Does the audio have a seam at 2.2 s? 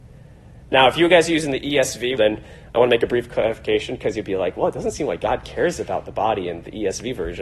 yes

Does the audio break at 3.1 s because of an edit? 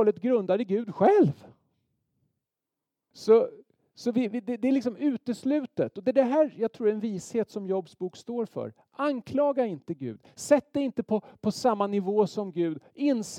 yes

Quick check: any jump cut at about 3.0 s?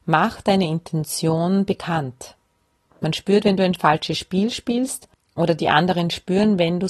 yes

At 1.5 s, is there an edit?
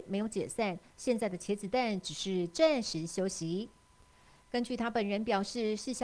no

